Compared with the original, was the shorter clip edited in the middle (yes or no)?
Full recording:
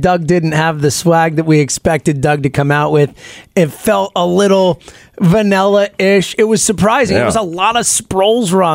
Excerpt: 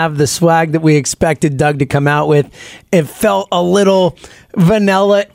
no